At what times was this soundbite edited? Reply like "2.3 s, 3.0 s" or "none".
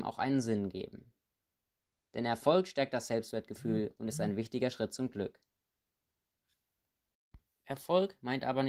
2.0 s